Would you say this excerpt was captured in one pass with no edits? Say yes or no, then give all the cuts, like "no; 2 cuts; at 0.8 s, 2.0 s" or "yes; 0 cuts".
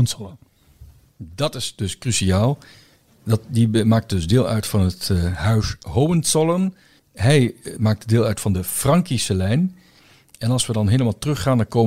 no; 1 cut; at 7.0 s